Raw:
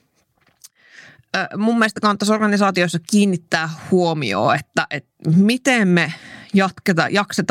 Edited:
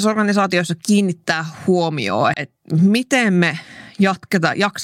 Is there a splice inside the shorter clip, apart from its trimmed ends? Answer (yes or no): yes